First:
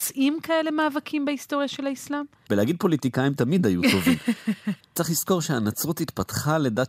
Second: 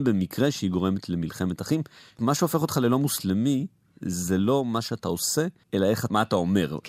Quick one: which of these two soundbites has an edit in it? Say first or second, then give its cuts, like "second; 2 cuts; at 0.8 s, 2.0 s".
first; 2 cuts; at 2.5 s, 4.8 s